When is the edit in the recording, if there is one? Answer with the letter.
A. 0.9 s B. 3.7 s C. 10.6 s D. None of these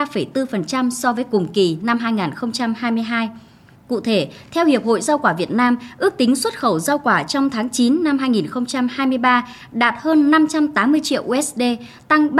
B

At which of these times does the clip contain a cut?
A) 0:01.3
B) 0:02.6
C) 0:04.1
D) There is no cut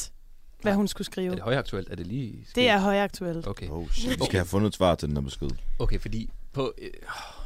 C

